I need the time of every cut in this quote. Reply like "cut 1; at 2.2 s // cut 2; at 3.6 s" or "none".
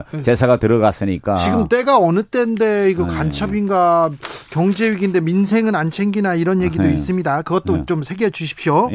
none